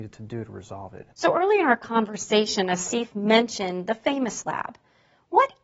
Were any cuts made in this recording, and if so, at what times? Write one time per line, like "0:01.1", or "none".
0:01.1